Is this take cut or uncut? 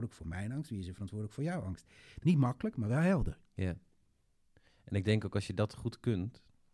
cut